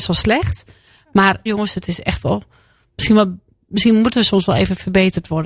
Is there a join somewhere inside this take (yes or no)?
yes